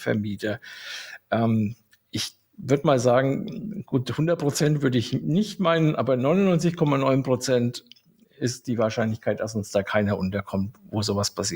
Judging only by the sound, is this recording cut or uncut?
uncut